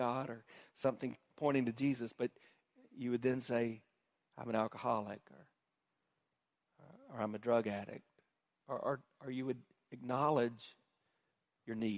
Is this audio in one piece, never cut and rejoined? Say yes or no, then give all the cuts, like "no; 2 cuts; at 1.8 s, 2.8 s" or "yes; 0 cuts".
yes; 0 cuts